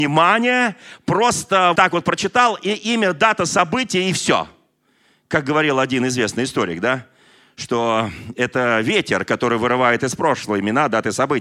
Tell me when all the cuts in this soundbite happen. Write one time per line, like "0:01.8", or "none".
0:01.7